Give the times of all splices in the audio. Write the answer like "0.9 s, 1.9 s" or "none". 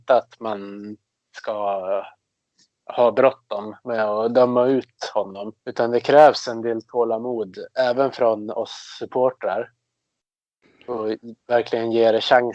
5.6 s